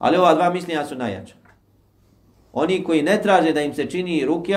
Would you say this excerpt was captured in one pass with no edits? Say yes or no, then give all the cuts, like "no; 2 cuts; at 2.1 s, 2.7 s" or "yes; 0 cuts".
yes; 0 cuts